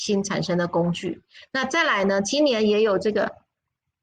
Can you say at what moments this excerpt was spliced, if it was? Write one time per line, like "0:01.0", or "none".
none